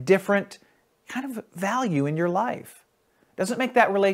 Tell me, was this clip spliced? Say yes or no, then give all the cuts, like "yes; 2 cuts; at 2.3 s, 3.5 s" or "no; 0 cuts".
no; 0 cuts